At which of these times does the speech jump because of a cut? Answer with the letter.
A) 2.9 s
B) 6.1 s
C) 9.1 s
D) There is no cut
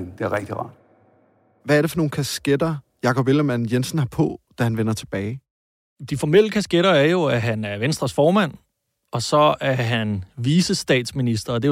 D